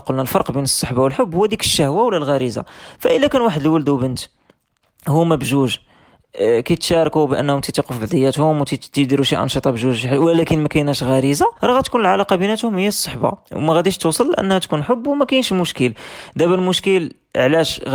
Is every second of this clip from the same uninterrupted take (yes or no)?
no